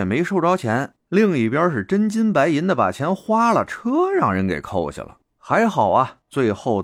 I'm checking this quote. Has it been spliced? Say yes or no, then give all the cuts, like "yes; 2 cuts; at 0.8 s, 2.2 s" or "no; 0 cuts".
no; 0 cuts